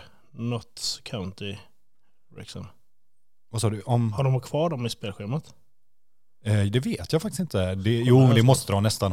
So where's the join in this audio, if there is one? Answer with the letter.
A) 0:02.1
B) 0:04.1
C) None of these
C